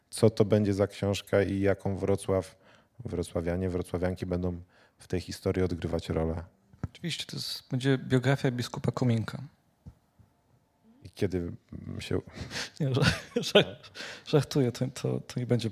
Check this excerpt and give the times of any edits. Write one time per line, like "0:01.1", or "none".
none